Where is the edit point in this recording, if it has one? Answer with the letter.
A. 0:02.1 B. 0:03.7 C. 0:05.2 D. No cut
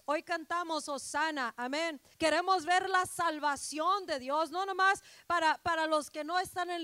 A